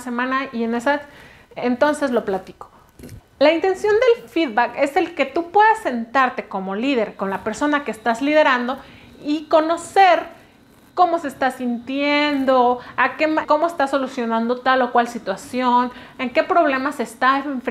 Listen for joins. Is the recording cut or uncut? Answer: cut